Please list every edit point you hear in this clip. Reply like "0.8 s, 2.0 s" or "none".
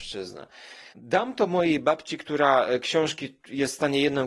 0.9 s